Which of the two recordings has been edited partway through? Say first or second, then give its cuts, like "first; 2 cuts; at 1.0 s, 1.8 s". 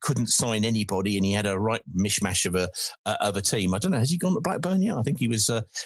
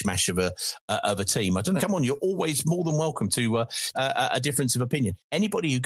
second; 2 cuts; at 1.8 s, 3.9 s